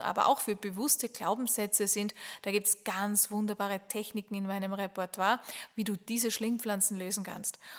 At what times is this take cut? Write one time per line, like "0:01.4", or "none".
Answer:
none